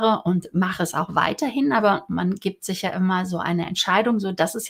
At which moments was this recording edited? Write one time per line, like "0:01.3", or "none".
none